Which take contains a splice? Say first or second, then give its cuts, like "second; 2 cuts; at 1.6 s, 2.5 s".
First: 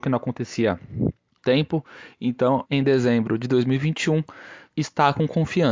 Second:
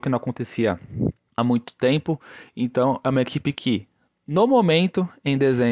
first; 3 cuts; at 1.4 s, 2.7 s, 4.7 s